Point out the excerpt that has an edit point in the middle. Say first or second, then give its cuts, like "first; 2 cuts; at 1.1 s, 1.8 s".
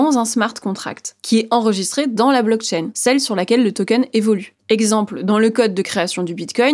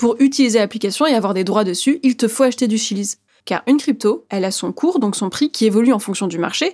second; 1 cut; at 3.4 s